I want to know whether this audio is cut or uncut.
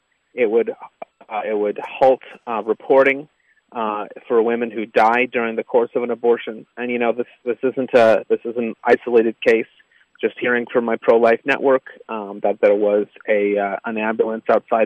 uncut